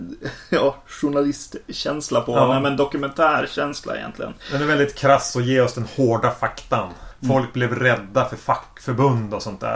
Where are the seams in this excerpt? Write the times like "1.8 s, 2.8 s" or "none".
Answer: 7.1 s